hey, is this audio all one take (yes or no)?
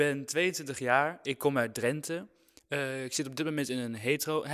yes